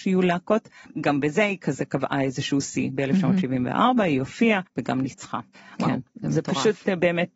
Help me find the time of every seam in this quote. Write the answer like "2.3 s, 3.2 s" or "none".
4.7 s, 5.7 s

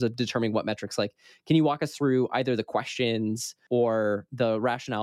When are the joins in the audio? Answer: none

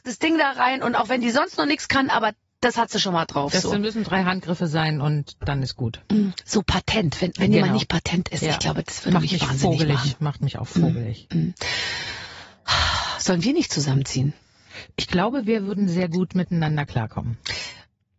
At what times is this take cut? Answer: none

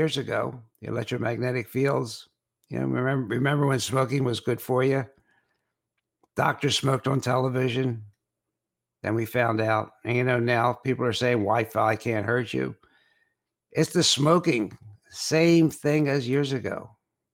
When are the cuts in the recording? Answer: none

